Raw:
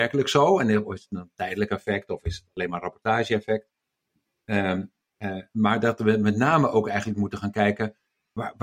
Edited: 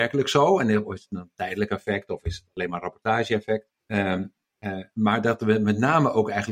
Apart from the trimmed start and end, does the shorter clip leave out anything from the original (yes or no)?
yes